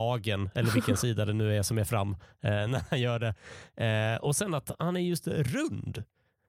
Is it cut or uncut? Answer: uncut